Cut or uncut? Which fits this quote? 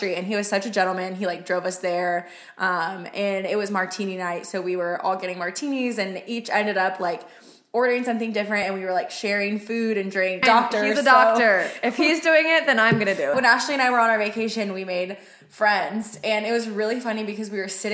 cut